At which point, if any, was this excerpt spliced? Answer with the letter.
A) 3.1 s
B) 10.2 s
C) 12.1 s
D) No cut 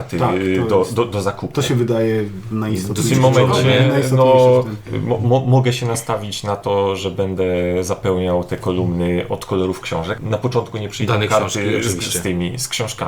B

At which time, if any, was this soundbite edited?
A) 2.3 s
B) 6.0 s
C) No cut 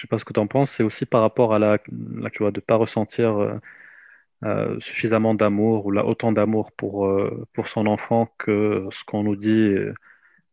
A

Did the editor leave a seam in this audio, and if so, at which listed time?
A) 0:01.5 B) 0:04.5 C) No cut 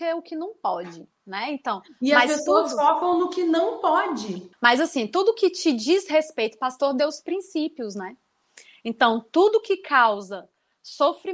B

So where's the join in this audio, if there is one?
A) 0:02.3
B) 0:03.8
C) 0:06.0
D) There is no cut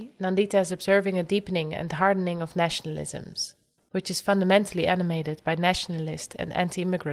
B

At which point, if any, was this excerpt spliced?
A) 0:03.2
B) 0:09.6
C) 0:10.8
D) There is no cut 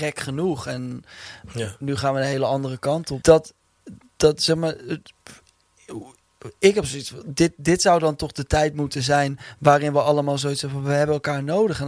A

